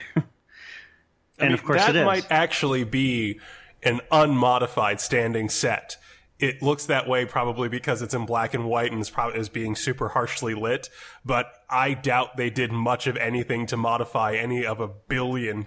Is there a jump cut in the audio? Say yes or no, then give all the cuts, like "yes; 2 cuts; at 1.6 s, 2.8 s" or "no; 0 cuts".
no; 0 cuts